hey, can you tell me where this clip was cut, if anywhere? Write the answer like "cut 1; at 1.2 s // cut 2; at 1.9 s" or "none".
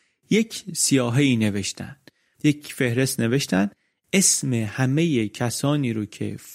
none